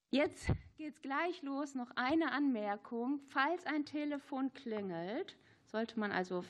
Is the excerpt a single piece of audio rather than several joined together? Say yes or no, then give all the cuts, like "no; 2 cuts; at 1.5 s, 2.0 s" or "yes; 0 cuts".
yes; 0 cuts